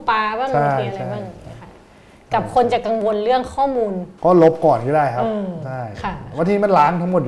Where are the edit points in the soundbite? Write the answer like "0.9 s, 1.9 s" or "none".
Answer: 4.2 s